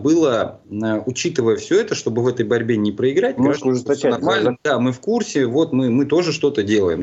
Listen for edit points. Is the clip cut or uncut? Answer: cut